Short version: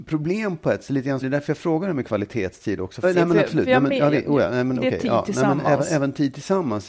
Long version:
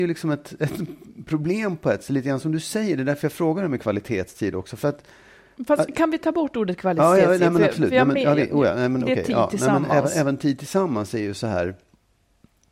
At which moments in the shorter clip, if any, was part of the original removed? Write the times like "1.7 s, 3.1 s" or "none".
1.2 s, 3.0 s

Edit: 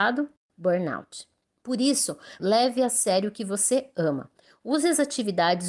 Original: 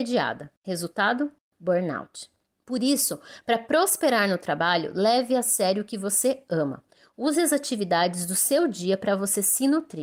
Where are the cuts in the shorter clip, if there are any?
2.4 s

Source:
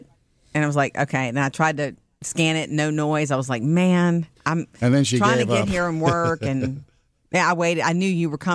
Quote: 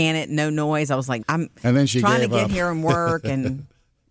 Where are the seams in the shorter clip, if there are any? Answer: 1.2 s

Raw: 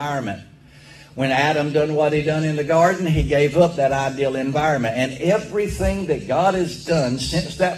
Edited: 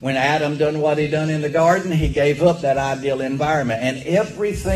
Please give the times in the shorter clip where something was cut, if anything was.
none

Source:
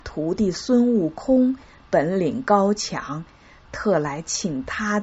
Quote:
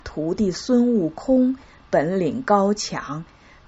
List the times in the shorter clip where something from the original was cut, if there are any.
none

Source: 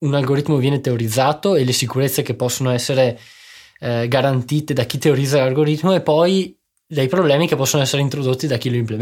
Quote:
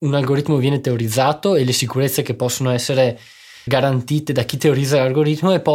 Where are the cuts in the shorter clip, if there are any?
3.7 s

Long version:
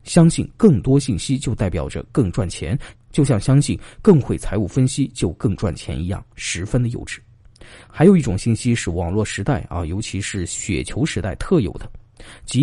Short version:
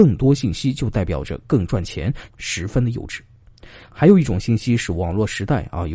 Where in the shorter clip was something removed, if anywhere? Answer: 2.3 s

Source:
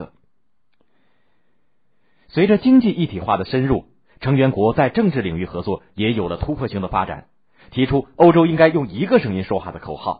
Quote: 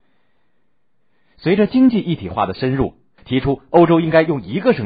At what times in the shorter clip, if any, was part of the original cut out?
3.2 s

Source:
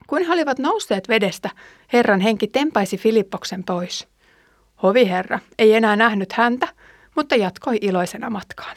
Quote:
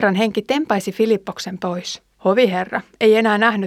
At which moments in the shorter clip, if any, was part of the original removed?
2.1 s

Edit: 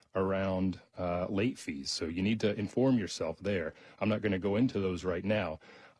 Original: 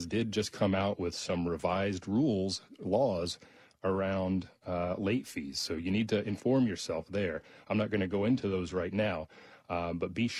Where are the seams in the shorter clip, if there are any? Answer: none

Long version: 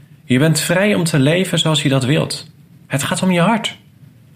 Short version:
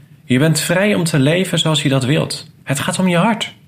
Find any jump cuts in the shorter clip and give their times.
2.6 s

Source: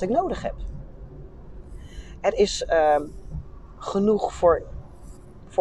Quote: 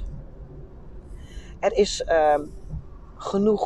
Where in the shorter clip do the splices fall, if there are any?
none

